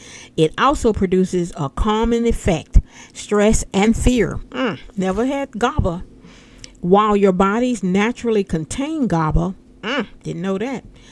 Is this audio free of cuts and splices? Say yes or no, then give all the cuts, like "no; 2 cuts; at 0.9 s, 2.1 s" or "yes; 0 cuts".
no; 1 cut; at 3.1 s